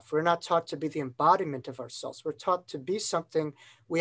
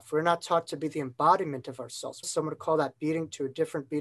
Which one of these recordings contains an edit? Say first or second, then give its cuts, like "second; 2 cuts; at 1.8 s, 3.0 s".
second; 1 cut; at 2.2 s